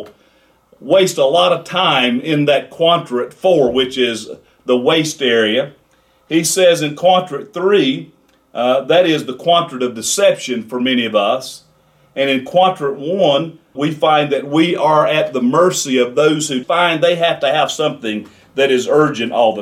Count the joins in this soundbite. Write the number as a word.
two